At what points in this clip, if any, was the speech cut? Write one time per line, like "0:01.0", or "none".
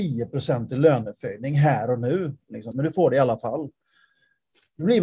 0:02.7